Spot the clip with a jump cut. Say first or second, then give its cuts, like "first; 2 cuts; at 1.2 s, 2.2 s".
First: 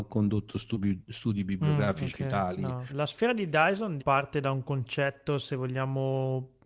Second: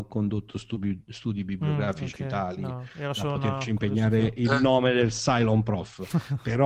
first; 2 cuts; at 2.9 s, 4.0 s